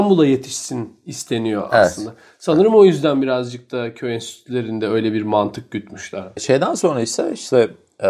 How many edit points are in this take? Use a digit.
1